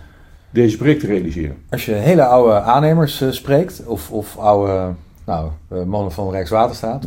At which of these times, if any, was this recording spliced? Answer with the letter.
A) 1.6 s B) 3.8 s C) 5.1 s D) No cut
D